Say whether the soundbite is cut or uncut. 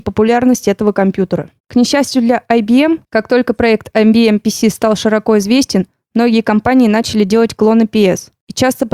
cut